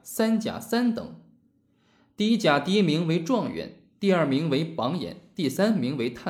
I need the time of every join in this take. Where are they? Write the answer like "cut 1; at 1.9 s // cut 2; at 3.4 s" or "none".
none